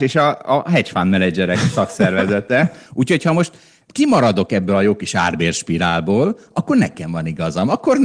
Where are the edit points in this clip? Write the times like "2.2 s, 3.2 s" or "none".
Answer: 2.9 s